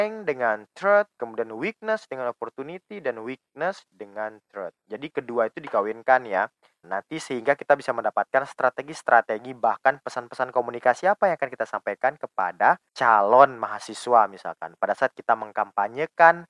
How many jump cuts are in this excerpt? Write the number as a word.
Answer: two